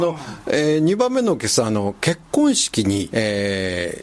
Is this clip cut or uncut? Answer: cut